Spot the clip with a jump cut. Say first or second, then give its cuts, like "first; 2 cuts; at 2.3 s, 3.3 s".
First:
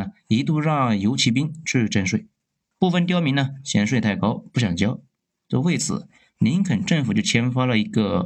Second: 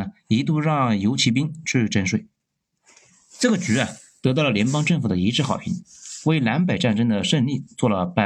first; 1 cut; at 2.7 s